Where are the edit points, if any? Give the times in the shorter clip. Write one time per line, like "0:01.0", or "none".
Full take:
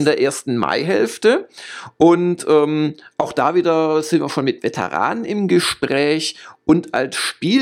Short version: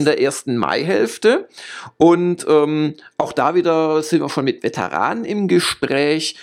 none